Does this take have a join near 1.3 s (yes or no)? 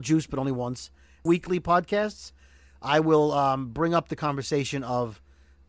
yes